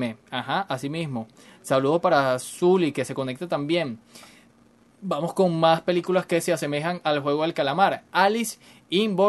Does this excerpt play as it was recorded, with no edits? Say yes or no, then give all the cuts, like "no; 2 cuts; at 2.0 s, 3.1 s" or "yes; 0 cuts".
yes; 0 cuts